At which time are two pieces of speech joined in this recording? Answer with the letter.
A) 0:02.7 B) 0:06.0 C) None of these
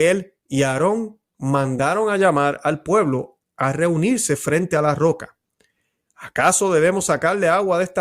B